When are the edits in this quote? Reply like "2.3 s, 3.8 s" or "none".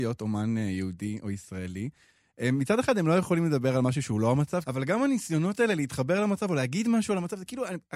4.6 s